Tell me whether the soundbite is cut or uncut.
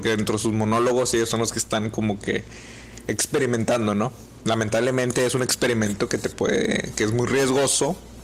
cut